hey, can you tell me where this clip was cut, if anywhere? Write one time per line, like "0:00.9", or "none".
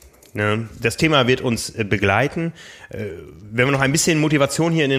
none